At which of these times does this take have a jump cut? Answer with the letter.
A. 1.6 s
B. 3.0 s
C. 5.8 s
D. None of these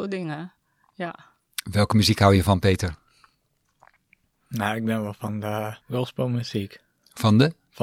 C